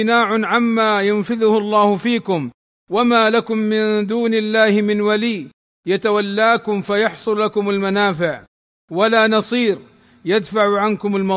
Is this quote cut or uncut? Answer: uncut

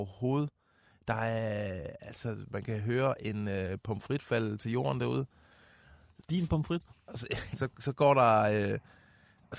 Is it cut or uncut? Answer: cut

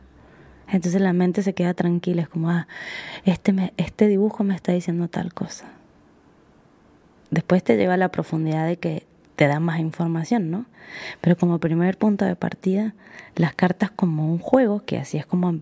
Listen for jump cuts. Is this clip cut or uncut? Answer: uncut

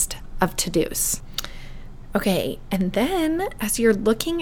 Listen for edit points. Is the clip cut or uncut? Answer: uncut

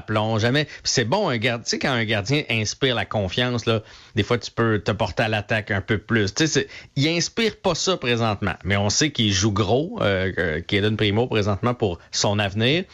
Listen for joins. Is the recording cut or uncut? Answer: uncut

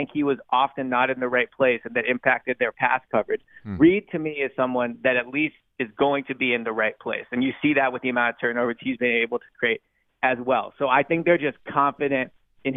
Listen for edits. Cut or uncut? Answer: uncut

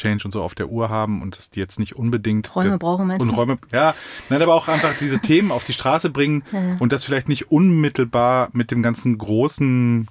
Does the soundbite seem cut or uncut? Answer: uncut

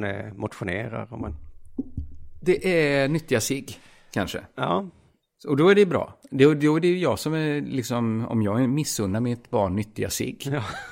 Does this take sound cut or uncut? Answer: uncut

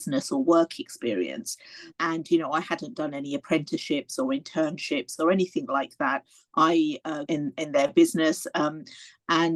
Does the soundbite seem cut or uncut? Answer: cut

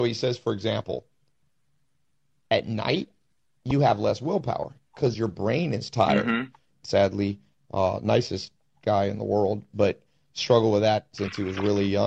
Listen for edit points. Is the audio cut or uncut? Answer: cut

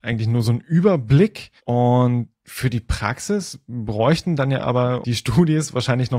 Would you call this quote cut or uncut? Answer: cut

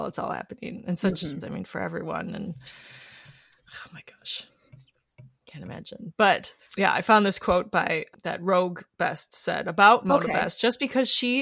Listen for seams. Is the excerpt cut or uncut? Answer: cut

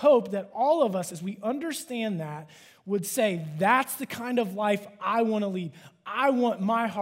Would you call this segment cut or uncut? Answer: uncut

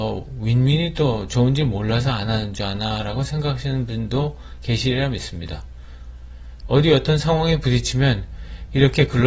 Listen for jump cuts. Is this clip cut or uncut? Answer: cut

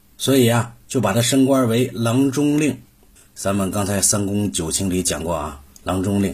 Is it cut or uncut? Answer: uncut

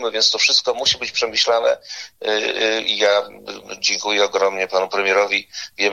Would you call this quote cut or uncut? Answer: uncut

